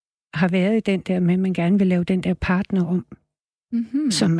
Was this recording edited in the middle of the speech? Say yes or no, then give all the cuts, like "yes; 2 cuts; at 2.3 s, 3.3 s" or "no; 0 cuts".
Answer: no; 0 cuts